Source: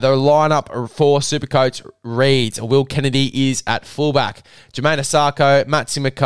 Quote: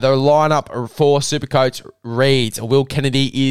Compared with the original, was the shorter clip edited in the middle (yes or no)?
no